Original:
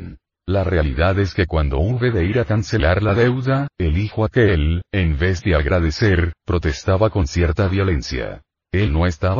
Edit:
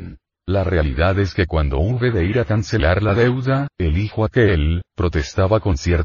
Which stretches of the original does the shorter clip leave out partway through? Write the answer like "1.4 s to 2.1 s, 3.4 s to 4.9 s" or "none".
4.9 s to 6.4 s